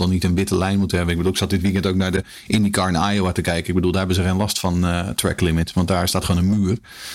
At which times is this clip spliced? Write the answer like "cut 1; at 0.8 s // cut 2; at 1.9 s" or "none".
none